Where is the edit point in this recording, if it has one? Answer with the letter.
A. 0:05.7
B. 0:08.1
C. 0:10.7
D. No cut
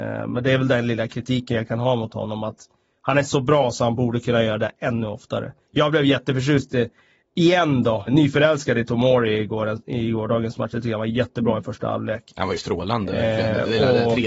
B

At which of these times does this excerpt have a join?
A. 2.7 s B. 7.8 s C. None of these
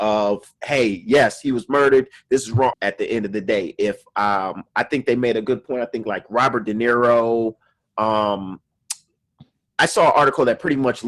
A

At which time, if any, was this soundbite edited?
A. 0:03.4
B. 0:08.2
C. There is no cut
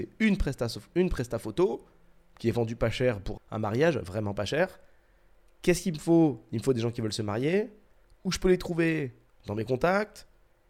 A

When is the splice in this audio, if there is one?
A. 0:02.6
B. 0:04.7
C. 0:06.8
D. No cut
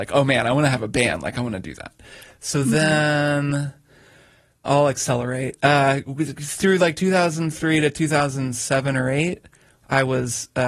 B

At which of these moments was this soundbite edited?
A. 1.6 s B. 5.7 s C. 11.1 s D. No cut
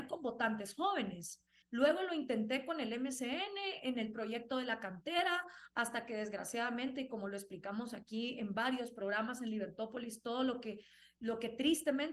A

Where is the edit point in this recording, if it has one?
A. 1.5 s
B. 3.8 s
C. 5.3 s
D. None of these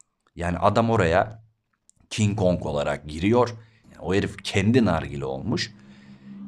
B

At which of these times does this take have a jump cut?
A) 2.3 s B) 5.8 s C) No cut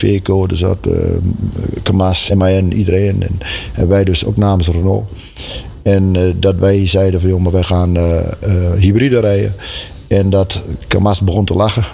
A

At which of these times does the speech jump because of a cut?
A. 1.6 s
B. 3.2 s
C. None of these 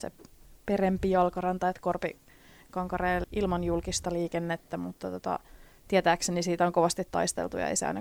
B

